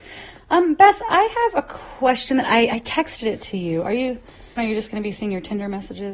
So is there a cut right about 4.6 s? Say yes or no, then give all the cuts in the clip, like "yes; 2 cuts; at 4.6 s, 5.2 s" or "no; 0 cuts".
yes; 1 cut; at 4.6 s